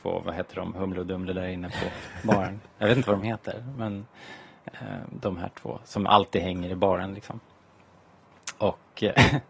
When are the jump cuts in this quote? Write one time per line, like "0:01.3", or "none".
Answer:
none